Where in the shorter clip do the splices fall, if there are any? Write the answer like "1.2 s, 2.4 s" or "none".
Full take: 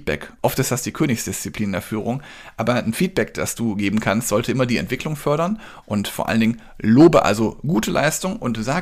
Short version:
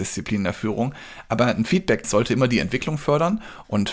2.0 s